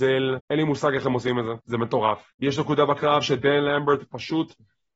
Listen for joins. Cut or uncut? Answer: cut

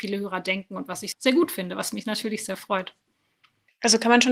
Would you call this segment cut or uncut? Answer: cut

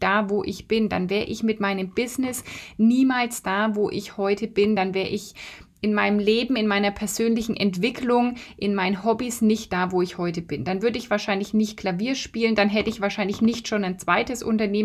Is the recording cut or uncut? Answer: uncut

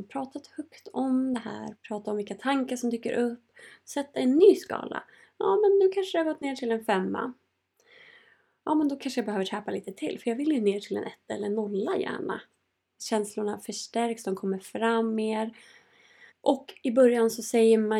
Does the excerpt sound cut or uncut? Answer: cut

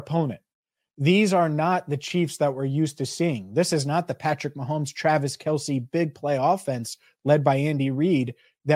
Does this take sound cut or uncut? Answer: uncut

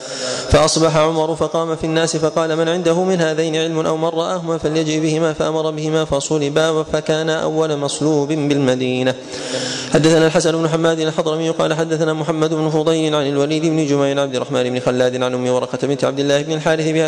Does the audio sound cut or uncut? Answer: uncut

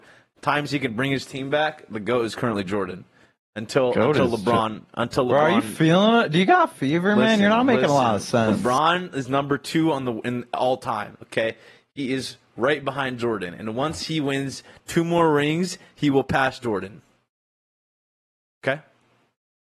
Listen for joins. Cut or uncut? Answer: uncut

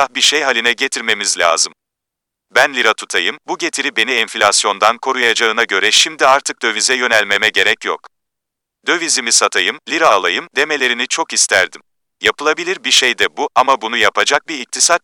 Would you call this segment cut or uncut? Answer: cut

